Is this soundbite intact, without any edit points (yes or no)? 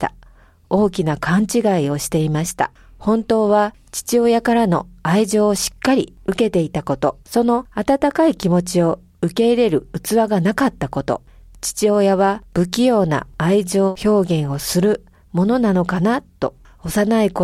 no